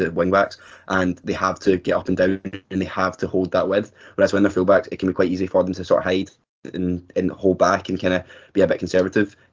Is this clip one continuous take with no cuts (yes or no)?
yes